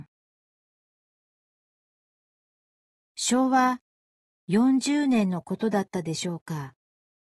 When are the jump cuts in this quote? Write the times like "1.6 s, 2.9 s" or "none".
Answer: none

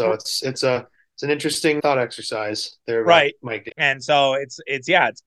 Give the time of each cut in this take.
1.8 s, 3.7 s

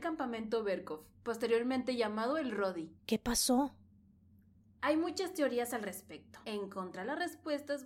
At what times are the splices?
3.0 s, 6.4 s

